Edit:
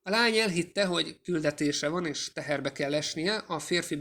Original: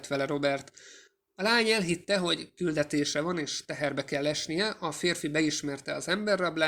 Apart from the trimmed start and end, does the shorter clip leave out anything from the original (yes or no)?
no